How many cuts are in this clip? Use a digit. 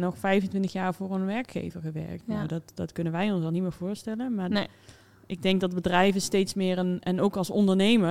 0